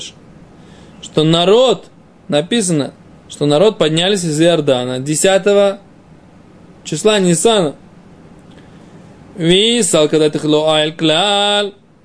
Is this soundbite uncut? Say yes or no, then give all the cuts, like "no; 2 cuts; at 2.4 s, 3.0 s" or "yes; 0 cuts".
yes; 0 cuts